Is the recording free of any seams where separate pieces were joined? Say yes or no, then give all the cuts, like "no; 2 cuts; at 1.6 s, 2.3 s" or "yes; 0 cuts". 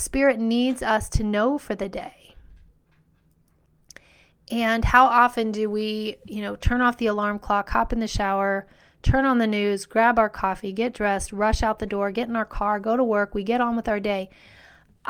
yes; 0 cuts